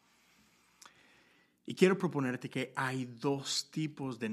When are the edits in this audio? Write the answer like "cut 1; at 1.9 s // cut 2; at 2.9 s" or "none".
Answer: none